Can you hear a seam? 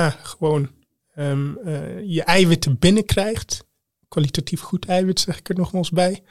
no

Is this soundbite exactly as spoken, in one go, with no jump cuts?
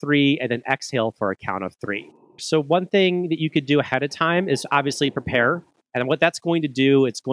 no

